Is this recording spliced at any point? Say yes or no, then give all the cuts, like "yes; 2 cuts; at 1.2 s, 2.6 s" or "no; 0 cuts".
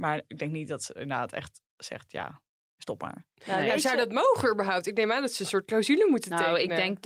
no; 0 cuts